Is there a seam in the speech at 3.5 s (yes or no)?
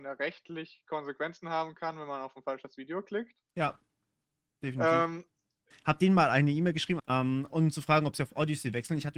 no